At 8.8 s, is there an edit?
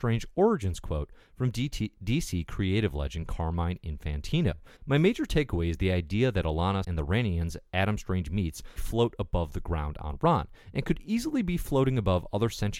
yes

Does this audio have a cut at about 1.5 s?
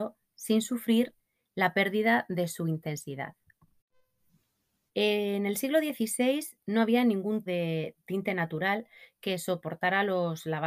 no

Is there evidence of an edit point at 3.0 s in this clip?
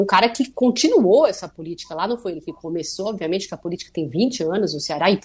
no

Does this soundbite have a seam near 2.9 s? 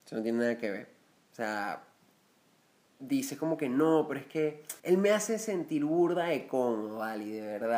no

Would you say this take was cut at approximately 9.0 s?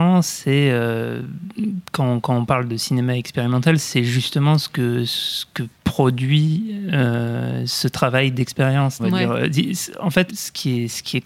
yes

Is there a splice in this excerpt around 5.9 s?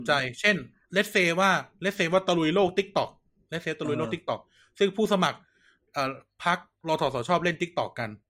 no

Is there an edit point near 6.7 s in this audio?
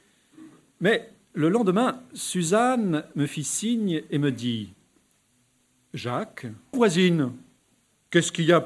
yes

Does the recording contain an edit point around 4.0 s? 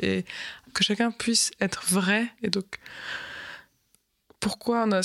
no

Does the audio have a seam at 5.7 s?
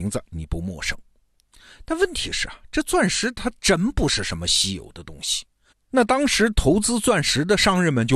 yes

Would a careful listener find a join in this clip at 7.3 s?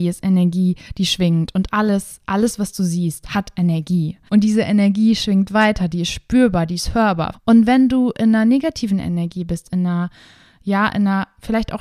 yes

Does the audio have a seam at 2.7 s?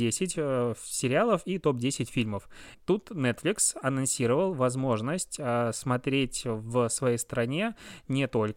yes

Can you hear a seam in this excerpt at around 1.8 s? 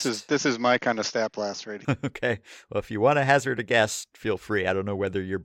yes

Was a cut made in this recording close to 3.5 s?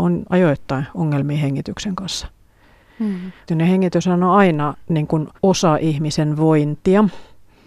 yes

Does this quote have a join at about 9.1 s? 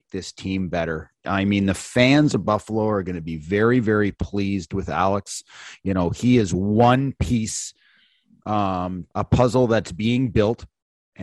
yes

